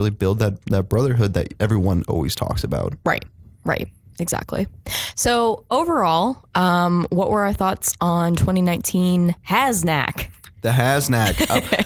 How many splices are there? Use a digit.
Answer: 0